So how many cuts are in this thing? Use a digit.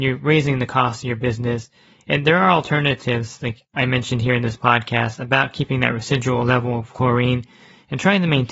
0